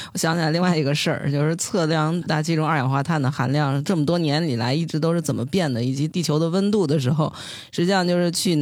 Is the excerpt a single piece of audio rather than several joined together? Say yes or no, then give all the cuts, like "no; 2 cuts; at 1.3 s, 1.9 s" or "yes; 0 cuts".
yes; 0 cuts